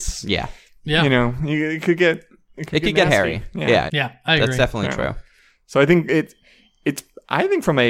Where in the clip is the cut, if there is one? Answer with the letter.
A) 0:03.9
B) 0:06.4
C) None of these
A